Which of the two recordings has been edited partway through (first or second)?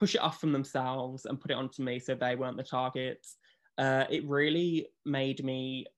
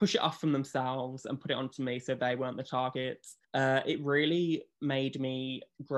second